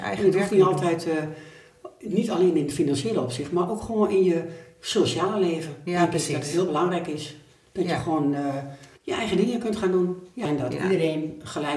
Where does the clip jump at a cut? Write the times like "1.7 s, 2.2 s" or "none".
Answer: 9.0 s